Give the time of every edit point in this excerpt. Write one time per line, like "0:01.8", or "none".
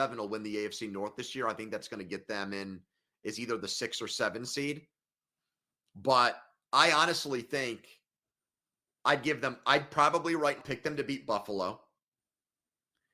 0:10.6